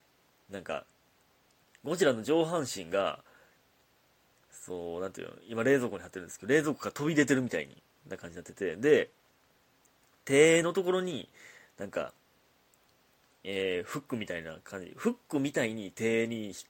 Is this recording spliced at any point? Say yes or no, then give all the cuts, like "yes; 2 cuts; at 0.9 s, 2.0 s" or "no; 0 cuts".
no; 0 cuts